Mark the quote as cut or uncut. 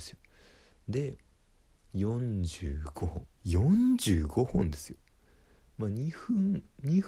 cut